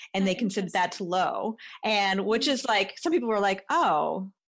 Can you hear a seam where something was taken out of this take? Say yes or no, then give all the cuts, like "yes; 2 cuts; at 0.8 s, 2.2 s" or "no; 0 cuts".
no; 0 cuts